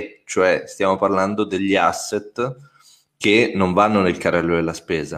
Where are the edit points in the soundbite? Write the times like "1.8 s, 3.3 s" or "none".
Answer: none